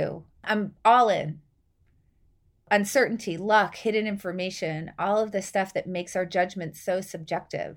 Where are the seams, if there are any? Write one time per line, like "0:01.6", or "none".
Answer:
none